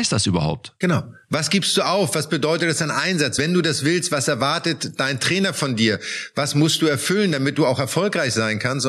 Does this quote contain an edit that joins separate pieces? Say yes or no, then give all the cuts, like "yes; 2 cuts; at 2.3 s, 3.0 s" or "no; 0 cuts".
no; 0 cuts